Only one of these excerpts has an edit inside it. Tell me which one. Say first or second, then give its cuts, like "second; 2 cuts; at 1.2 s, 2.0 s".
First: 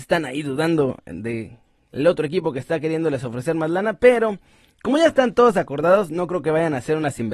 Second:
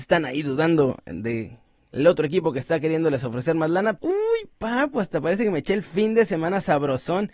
second; 1 cut; at 4.0 s